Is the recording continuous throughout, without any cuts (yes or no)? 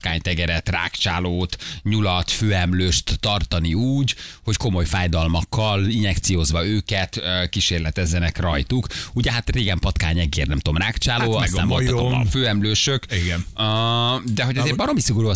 yes